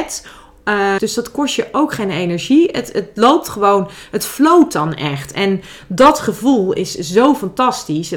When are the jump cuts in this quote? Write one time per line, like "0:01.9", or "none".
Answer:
0:01.0